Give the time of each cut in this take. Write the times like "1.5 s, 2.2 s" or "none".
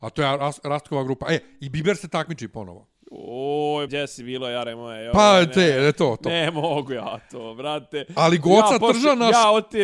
3.9 s